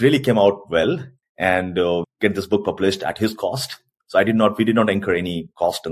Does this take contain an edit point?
yes; 1 cut; at 2.0 s

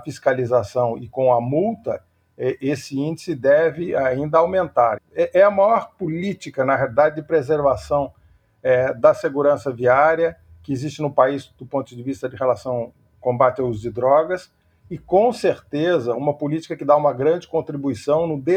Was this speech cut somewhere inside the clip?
yes; 1 cut; at 5.0 s

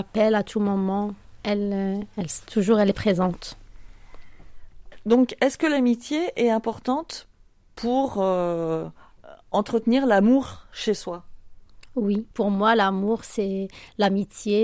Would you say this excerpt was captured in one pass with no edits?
no; 1 cut; at 12.3 s

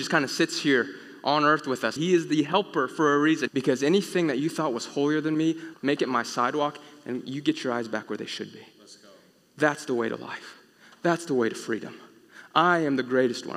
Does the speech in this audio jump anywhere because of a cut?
yes; 3 cuts; at 2.0 s, 3.5 s, 5.7 s

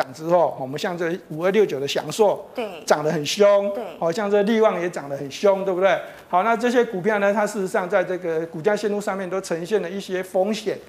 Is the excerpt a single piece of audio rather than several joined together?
yes; 0 cuts

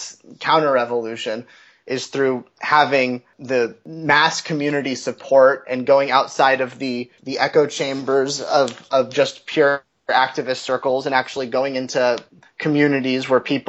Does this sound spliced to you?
no; 0 cuts

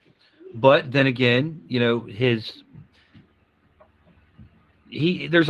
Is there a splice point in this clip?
no; 0 cuts

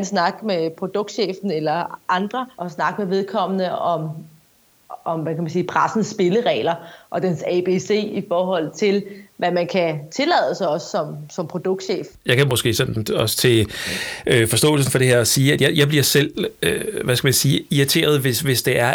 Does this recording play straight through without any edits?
yes; 0 cuts

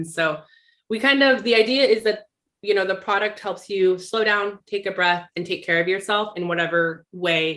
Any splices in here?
no; 0 cuts

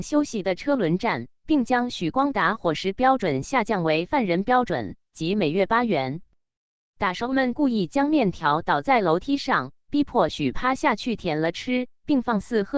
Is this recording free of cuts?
yes; 0 cuts

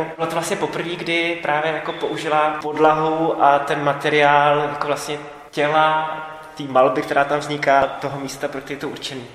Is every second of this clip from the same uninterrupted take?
yes; 0 cuts

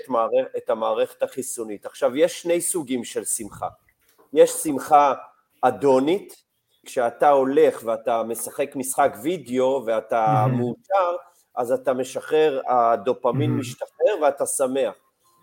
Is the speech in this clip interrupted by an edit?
yes; 1 cut; at 6.8 s

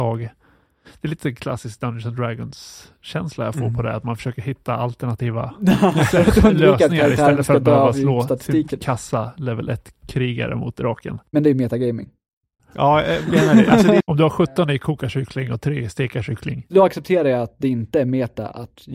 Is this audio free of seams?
no; 2 cuts; at 12.6 s, 14.0 s

